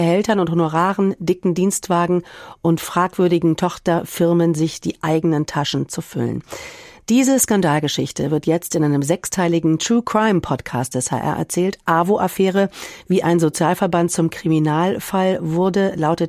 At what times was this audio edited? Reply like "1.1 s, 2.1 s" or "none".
none